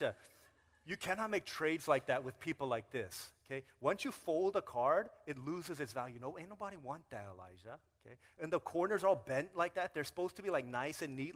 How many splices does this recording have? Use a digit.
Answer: 0